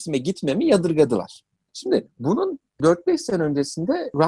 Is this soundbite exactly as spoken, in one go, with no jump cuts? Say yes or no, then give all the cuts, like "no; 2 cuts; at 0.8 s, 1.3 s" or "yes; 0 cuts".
yes; 0 cuts